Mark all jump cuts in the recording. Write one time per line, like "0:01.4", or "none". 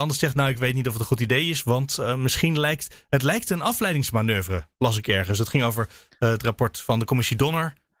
none